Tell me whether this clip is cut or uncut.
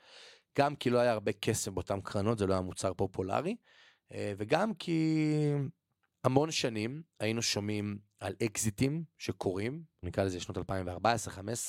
cut